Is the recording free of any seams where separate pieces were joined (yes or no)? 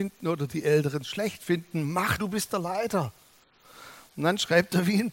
no